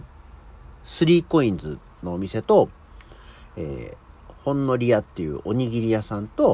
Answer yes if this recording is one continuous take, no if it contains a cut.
no